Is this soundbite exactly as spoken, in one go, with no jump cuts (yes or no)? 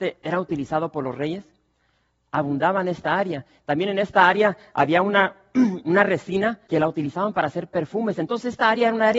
no